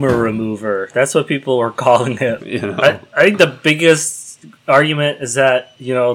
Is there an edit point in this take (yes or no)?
yes